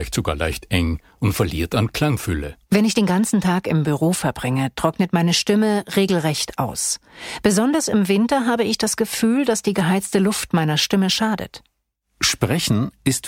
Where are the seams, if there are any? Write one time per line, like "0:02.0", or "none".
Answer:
0:02.6